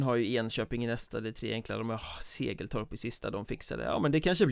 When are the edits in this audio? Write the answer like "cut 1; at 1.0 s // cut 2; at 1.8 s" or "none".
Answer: none